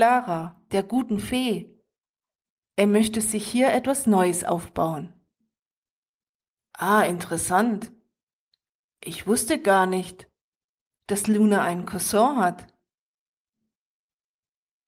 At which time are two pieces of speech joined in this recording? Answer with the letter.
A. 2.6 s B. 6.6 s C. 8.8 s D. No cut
D